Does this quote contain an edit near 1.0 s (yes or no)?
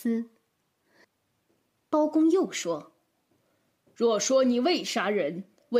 yes